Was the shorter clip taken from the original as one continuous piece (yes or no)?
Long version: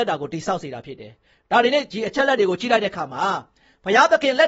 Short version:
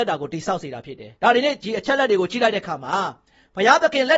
no